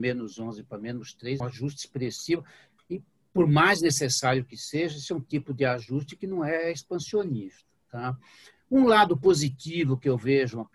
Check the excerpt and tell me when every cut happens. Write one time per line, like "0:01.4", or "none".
0:01.4